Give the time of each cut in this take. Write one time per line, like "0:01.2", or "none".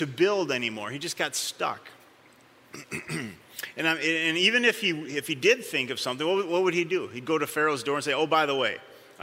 none